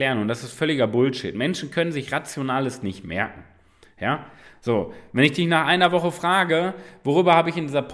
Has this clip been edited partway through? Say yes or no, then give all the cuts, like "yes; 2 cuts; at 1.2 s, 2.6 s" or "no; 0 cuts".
no; 0 cuts